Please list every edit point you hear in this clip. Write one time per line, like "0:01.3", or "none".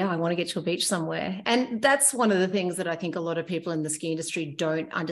none